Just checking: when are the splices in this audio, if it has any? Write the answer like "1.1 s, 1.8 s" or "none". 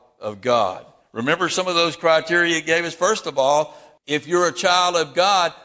4.0 s